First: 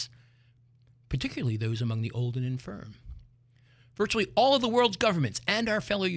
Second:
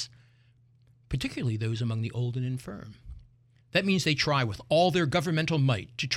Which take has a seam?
second; 1 cut; at 3.6 s

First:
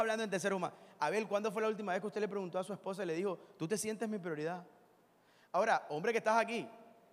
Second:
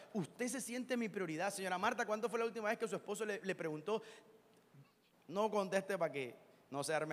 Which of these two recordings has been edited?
second; 1 cut; at 5.1 s

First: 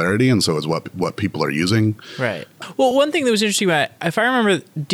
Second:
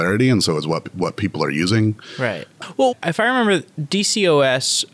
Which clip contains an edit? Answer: second; 1 cut; at 2.9 s

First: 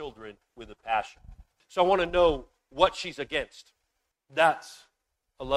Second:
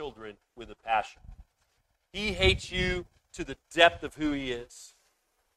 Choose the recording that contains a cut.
first; 2 cuts; at 1.6 s, 4.1 s

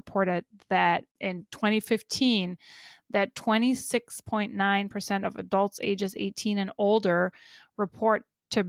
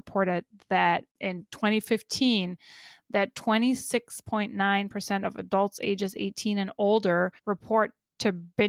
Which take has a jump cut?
second; 1 cut; at 7.4 s

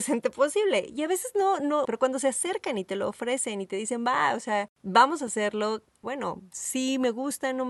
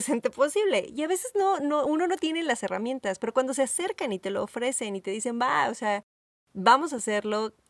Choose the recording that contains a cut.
first; 3 cuts; at 1.9 s, 4.7 s, 6.0 s

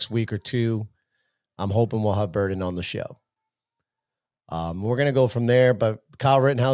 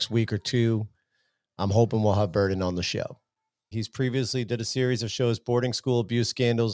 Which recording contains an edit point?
second; 1 cut; at 3.7 s

